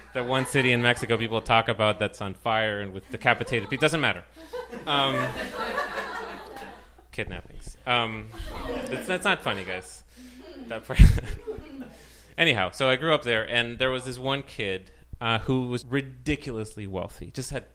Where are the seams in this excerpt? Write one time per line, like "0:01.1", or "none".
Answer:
0:15.8